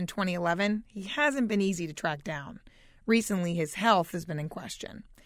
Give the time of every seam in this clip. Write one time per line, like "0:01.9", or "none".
none

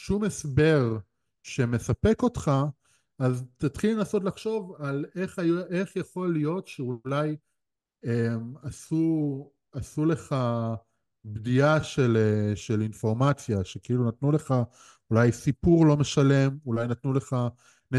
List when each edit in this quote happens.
none

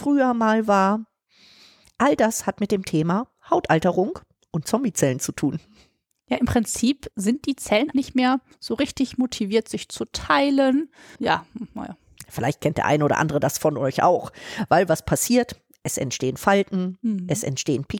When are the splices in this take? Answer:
0:07.9
0:11.1

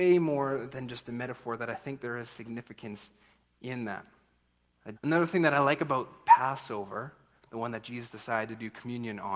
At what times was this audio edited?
0:05.0
0:07.5

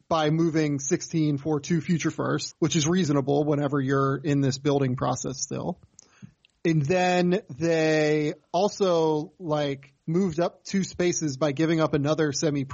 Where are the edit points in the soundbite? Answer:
0:02.5

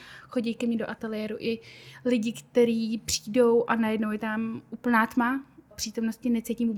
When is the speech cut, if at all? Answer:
0:05.7

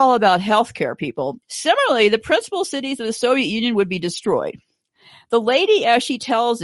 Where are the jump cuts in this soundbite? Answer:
0:01.4

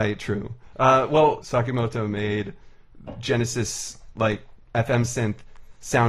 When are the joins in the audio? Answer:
0:01.4

